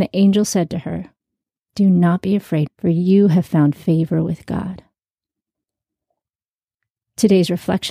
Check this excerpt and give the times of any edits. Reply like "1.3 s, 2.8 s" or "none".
2.7 s